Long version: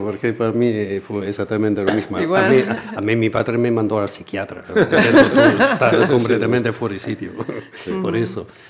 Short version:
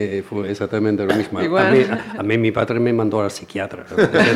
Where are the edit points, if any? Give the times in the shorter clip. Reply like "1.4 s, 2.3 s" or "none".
none

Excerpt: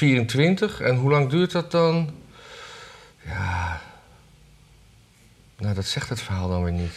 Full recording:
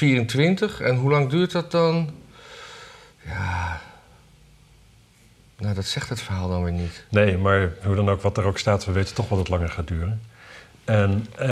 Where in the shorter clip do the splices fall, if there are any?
none

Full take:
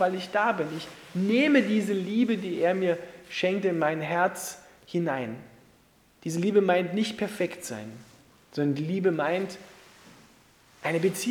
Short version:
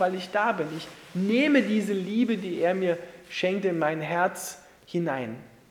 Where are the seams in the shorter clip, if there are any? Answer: none

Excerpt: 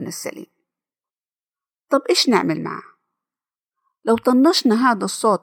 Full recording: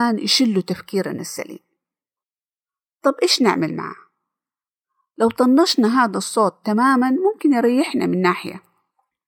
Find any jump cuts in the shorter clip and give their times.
none

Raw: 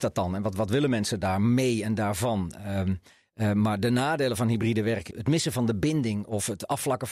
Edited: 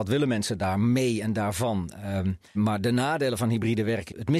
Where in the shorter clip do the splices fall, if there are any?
2.5 s

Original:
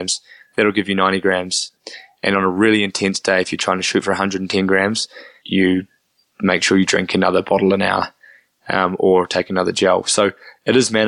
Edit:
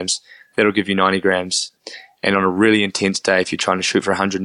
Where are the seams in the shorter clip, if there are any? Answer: none

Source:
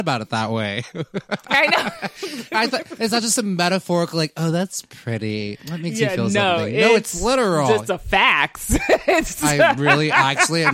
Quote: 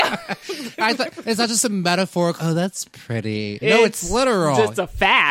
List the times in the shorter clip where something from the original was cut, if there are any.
2.4 s, 3.6 s

